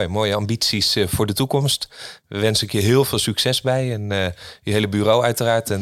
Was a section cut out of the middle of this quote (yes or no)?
no